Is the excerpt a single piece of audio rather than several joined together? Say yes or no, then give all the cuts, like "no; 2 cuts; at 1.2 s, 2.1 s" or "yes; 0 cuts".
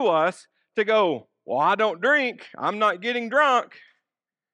yes; 0 cuts